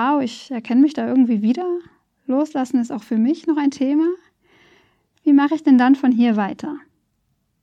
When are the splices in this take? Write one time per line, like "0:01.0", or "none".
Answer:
none